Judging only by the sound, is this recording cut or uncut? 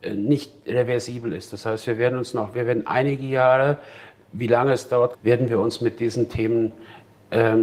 cut